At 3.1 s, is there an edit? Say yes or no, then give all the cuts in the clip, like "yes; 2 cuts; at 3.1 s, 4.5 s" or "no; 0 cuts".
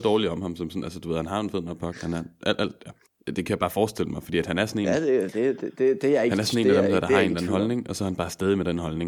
yes; 1 cut; at 3.1 s